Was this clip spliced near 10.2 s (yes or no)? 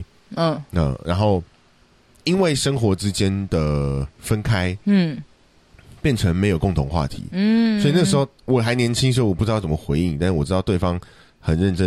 no